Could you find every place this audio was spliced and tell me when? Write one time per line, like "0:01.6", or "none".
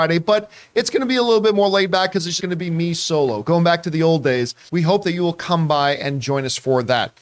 0:02.4
0:04.7